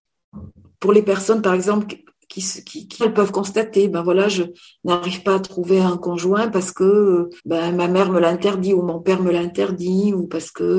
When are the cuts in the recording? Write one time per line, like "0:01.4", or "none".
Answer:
0:03.0
0:07.4